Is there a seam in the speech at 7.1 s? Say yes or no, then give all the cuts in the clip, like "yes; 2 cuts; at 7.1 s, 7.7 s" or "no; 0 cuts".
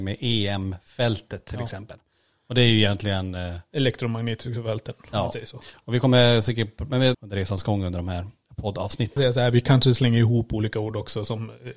yes; 2 cuts; at 7.1 s, 9.2 s